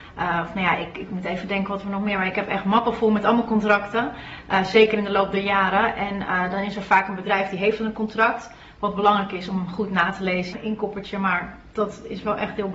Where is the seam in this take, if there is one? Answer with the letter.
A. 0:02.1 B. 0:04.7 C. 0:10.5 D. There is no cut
C